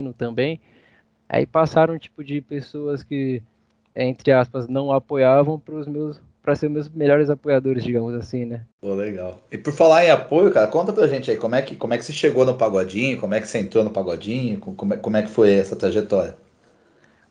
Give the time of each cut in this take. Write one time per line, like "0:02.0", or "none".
0:08.7